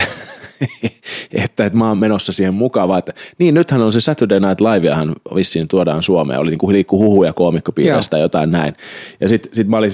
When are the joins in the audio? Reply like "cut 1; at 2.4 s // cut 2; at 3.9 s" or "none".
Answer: none